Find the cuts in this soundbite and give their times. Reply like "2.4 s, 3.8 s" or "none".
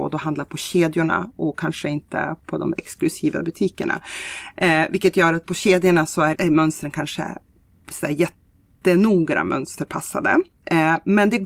6.3 s